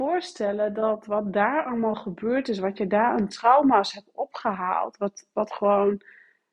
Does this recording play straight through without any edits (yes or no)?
yes